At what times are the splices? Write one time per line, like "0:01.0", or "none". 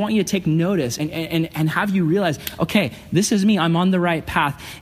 none